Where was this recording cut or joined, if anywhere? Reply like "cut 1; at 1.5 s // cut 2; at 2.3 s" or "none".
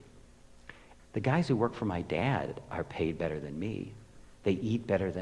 cut 1; at 1.0 s